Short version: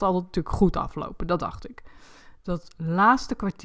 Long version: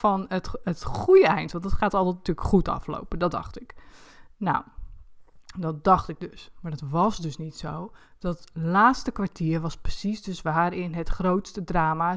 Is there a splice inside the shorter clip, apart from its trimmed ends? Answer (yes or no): yes